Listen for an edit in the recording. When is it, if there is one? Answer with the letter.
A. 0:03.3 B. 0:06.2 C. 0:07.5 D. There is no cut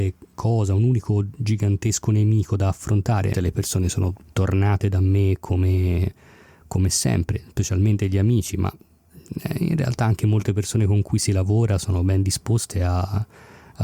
A